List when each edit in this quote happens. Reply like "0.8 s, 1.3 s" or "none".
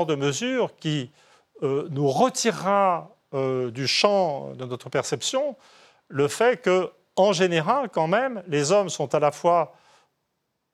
none